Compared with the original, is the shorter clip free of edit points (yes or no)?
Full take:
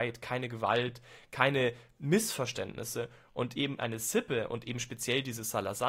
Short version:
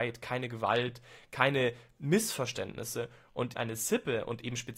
no